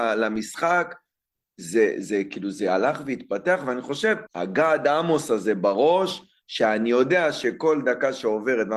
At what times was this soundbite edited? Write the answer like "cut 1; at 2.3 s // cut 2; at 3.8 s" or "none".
cut 1; at 4.3 s